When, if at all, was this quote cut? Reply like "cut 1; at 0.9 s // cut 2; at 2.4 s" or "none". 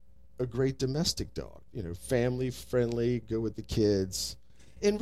cut 1; at 1.7 s